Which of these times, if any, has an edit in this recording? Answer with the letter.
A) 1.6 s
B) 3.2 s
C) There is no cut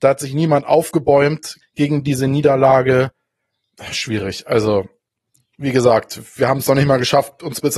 A